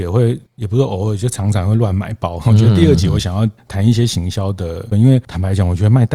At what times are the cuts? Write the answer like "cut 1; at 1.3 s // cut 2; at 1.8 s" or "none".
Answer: cut 1; at 2.4 s // cut 2; at 4.9 s